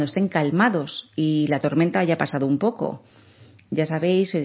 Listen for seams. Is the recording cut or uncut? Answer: uncut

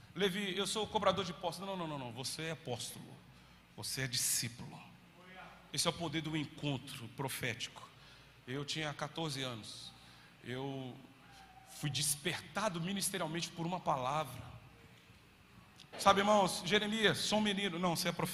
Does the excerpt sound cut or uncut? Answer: cut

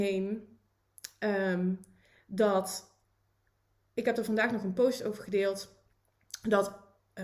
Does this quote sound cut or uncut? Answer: uncut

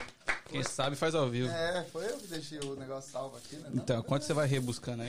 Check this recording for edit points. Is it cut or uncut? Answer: uncut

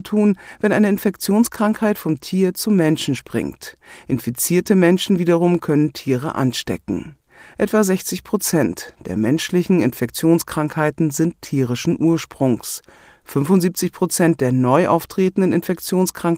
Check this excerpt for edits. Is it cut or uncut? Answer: uncut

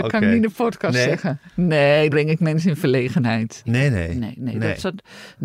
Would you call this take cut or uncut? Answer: cut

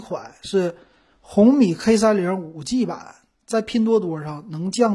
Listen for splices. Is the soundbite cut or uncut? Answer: uncut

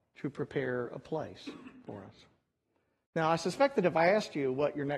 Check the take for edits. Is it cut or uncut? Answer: cut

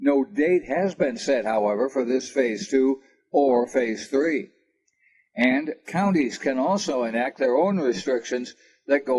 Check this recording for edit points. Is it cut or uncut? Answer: uncut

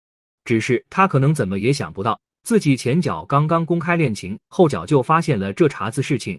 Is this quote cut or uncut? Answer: uncut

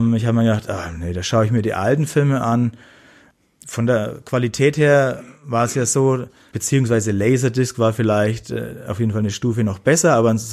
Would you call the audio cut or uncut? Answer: cut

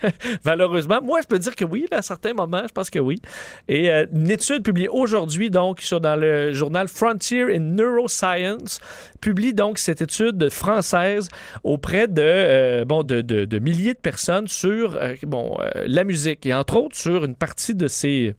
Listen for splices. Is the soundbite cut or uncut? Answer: uncut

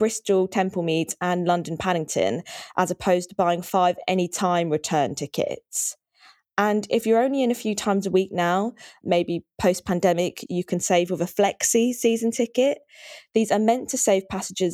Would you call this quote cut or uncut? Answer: cut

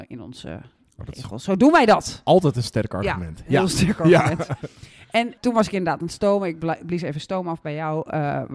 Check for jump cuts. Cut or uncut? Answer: uncut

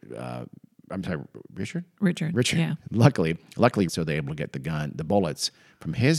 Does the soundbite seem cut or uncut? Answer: cut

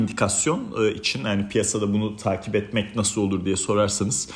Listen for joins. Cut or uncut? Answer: uncut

